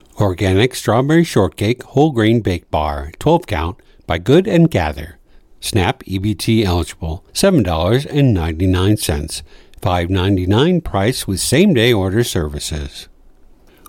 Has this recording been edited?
yes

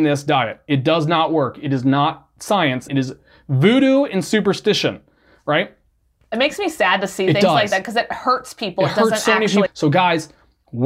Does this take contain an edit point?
yes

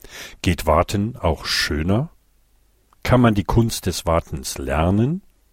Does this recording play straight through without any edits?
yes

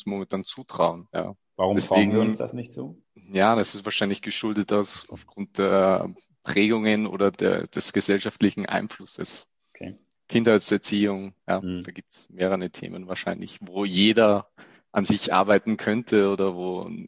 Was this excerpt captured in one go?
no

